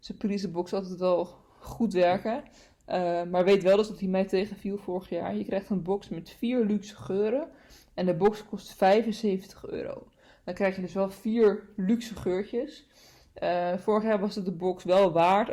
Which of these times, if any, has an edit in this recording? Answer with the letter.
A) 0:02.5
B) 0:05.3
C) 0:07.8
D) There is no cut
D